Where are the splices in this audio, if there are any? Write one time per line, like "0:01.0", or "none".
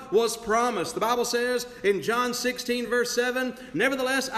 none